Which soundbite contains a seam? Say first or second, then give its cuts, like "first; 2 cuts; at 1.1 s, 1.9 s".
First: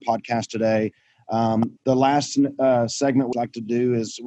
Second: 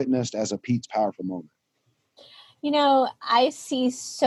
first; 2 cuts; at 1.8 s, 3.3 s